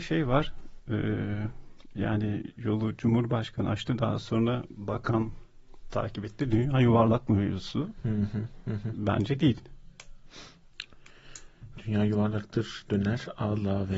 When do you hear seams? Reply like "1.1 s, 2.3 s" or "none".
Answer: none